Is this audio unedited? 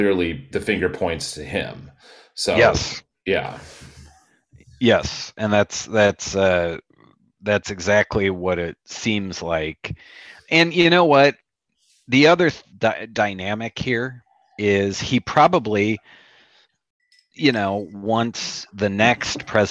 yes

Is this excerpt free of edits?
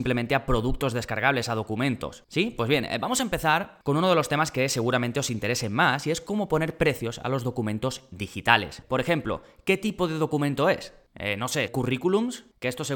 no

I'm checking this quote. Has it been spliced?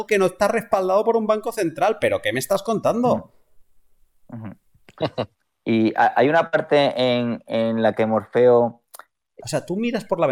yes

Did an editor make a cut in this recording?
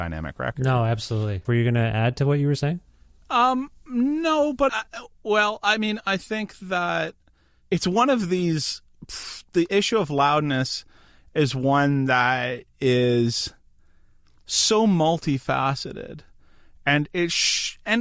yes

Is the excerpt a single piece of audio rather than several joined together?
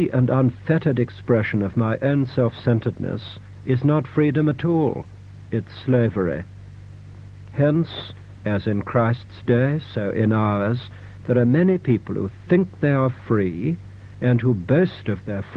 yes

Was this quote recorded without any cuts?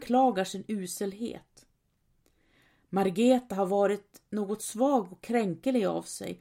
yes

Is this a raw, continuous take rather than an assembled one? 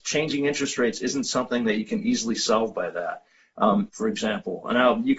no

